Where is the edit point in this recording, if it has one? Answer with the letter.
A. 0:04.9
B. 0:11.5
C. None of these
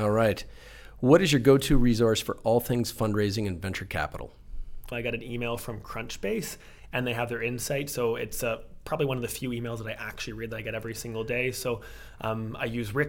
A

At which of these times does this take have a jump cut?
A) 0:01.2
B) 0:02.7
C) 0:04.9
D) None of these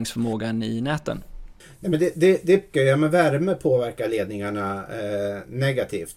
B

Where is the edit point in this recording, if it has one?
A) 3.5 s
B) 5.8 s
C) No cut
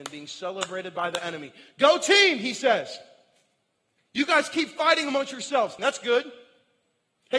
B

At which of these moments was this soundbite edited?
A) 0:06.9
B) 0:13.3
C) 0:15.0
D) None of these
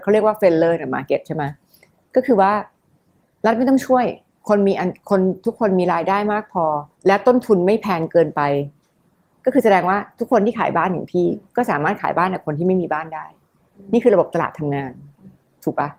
A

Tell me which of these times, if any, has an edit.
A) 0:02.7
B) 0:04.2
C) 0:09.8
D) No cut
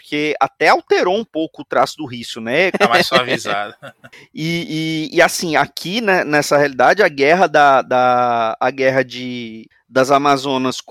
A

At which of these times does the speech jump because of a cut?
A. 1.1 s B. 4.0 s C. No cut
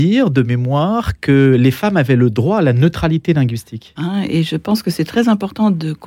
B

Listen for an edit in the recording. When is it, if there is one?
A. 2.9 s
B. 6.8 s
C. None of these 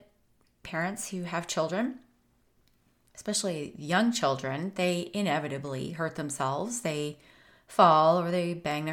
C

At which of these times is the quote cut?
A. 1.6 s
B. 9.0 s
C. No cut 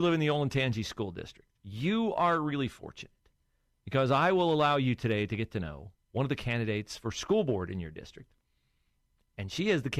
A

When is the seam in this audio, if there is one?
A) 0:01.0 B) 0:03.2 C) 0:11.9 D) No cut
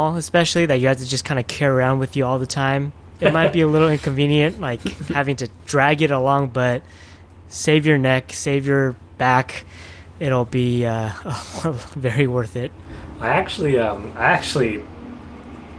B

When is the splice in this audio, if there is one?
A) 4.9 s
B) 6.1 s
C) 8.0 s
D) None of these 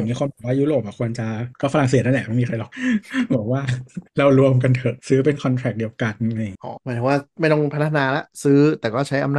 D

